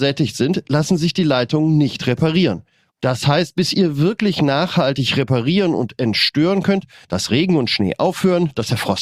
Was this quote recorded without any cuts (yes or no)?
no